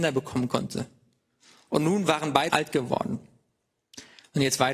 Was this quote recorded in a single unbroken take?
no; 1 cut; at 2.5 s

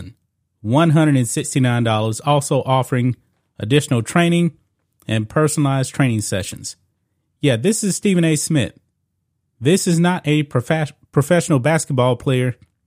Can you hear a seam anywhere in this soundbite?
no; 0 cuts

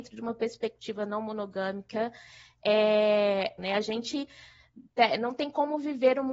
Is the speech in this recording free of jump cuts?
no; 1 cut; at 3.6 s

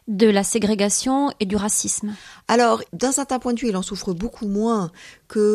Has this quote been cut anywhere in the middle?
no; 0 cuts

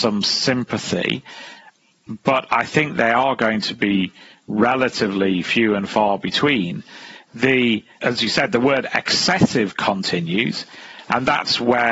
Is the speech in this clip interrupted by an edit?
yes; 1 cut; at 8.0 s

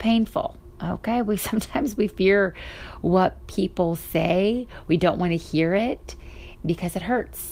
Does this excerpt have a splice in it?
no; 0 cuts

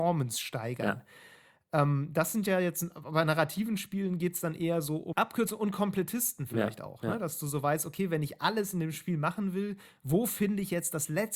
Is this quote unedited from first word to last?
no; 1 cut; at 5.1 s

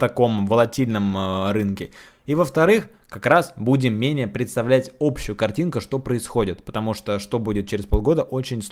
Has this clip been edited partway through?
no; 0 cuts

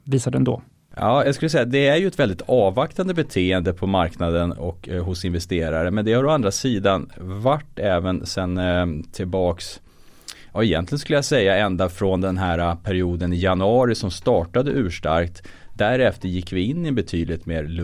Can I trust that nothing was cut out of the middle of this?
yes; 0 cuts

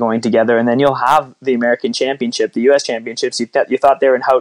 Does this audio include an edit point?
no; 0 cuts

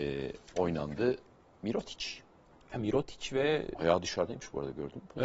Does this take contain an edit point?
no; 0 cuts

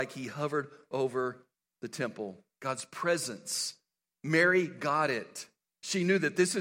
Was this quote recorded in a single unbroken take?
yes; 0 cuts

